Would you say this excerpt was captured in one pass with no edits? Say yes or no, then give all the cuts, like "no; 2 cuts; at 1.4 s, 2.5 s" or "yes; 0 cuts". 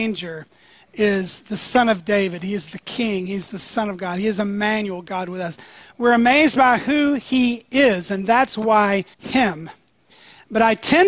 no; 1 cut; at 9.1 s